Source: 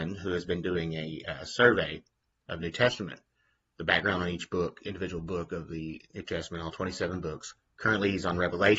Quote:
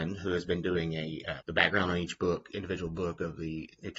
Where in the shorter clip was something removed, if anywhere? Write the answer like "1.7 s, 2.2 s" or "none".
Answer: 1.4 s